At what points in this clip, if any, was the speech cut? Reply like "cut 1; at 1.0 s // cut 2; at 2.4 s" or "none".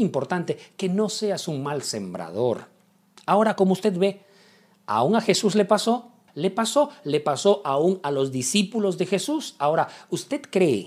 cut 1; at 3.2 s // cut 2; at 6.3 s